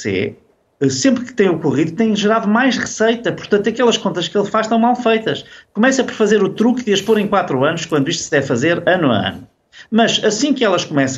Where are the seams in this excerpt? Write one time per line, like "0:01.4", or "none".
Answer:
none